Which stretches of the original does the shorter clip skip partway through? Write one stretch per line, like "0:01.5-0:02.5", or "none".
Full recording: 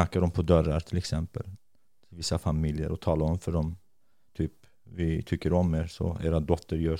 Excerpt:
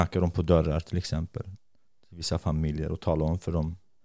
none

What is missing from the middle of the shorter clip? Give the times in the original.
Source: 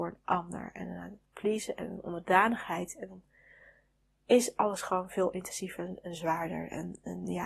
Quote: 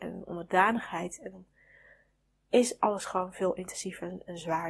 none

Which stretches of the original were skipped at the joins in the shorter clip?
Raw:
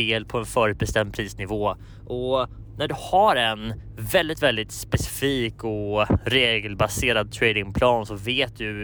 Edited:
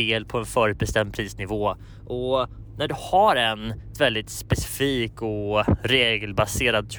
0:03.9-0:04.4

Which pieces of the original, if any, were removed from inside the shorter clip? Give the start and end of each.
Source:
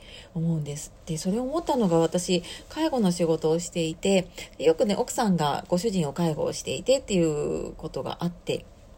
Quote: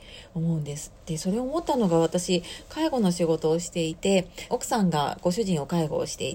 0:04.5-0:05.0

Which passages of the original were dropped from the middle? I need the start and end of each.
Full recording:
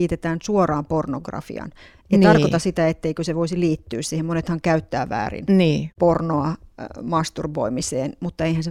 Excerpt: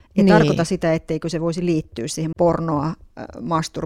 0:04.3-0:05.9

